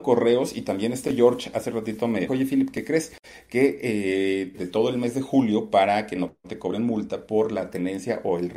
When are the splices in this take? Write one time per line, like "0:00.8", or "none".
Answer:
0:02.3
0:04.5